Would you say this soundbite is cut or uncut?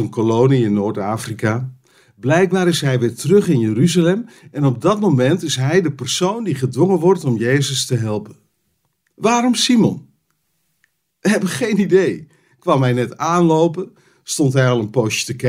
uncut